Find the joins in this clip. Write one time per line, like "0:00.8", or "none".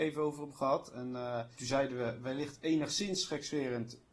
0:01.5